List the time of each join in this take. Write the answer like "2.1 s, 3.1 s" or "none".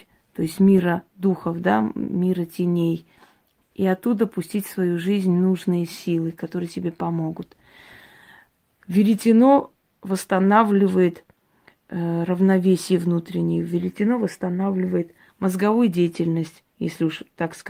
3.6 s